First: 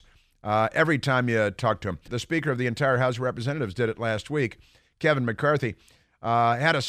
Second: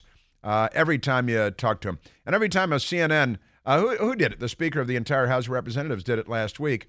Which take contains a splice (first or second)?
first